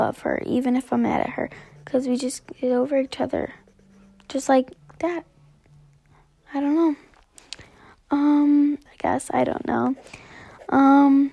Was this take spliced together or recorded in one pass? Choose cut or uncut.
cut